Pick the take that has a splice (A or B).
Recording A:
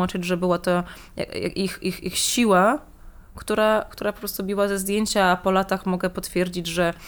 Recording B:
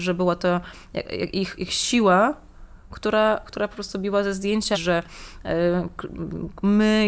B